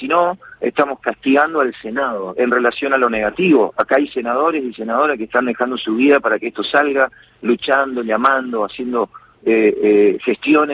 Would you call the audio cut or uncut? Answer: cut